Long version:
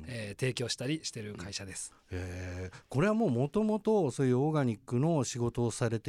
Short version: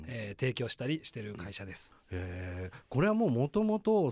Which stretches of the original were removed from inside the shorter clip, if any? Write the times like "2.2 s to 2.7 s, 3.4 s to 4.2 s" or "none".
none